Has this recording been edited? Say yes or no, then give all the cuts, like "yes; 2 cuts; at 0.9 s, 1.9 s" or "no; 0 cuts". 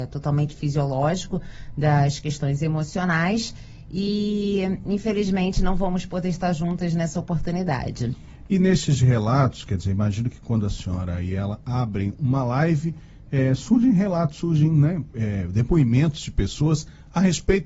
no; 0 cuts